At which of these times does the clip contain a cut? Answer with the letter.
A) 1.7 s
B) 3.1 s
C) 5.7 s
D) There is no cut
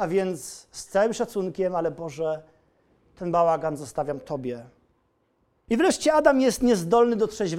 C